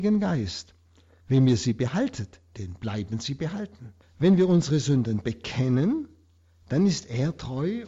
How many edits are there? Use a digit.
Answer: 2